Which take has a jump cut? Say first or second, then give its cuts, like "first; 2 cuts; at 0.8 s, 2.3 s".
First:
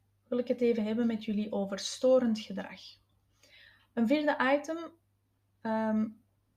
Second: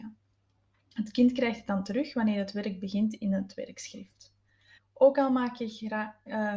second; 1 cut; at 4.8 s